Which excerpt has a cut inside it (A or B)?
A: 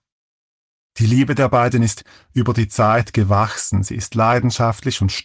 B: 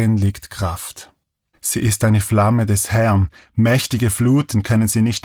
B